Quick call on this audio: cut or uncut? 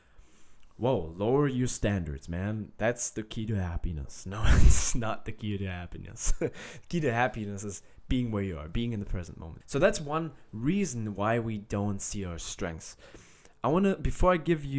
cut